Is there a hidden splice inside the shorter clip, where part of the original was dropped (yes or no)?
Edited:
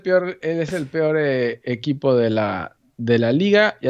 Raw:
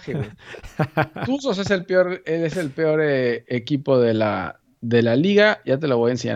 no